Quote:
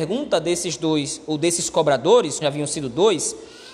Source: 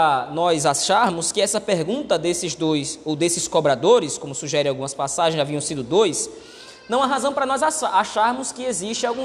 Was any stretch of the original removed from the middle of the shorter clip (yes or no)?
yes